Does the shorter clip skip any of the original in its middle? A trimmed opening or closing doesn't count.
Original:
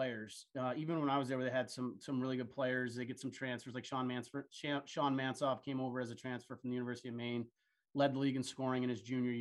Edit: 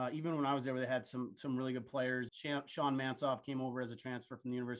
yes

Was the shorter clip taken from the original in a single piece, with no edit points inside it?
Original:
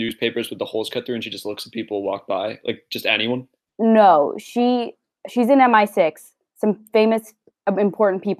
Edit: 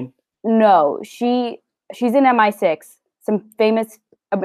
yes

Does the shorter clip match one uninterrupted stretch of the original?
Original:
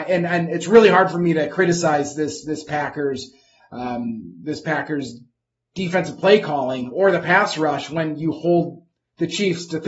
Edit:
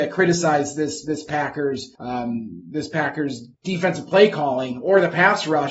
no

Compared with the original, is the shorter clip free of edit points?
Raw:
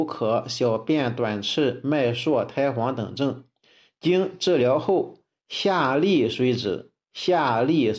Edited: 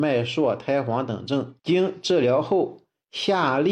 no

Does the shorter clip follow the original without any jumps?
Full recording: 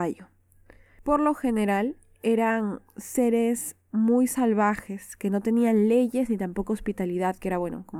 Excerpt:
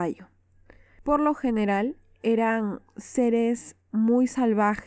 yes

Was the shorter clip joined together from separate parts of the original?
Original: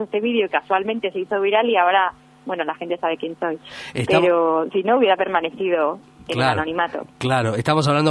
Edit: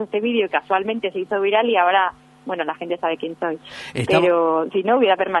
no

